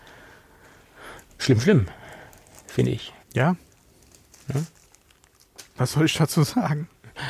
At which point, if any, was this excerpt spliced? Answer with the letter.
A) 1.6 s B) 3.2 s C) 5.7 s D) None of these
B